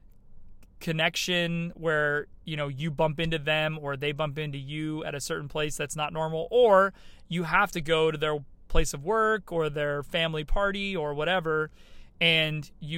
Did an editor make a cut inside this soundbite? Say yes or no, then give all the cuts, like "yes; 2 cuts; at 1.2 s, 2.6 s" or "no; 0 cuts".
no; 0 cuts